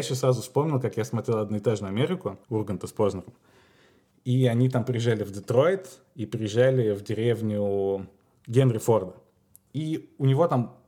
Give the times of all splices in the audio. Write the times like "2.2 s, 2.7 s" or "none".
2.4 s